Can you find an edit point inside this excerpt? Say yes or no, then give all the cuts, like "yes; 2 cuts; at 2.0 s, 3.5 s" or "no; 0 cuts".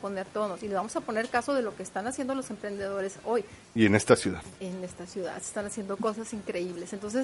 yes; 1 cut; at 3.6 s